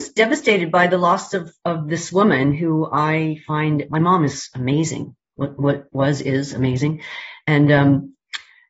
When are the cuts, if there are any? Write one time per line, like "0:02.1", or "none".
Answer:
0:03.9

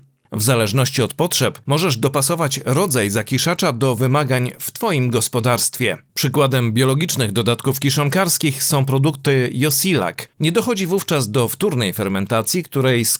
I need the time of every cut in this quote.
0:10.3

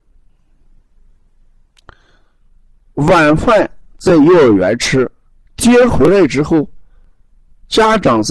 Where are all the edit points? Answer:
none

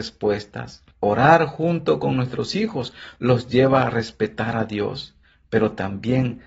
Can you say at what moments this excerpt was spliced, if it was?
0:00.9

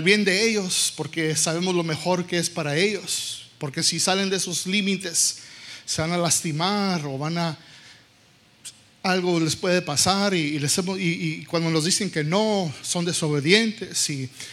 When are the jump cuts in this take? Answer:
none

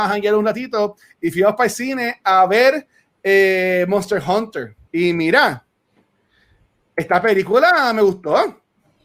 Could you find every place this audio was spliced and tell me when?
0:04.8

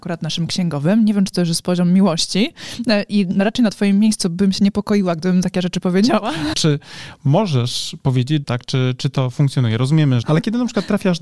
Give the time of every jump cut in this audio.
0:06.5
0:08.4
0:10.2

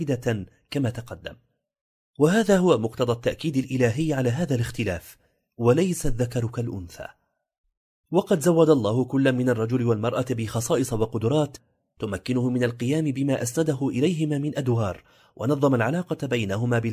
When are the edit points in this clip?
none

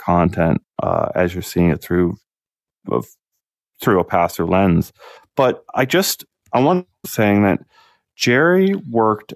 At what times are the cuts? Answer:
0:05.2
0:07.0

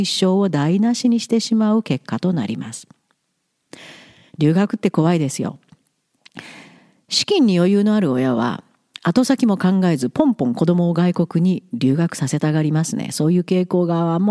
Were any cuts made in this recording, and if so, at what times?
none

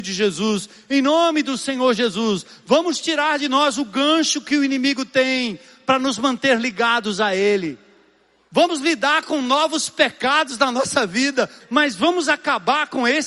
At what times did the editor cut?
0:08.5
0:11.6

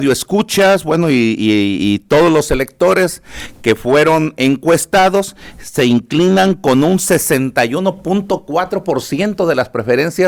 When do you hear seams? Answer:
none

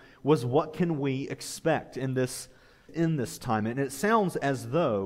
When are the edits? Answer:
0:02.9

